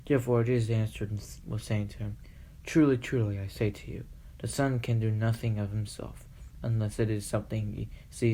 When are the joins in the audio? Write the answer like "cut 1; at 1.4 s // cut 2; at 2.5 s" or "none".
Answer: none